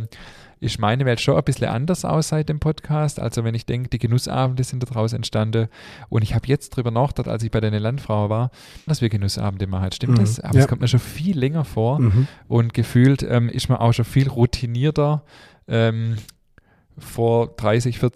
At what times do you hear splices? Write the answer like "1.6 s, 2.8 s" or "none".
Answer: 8.9 s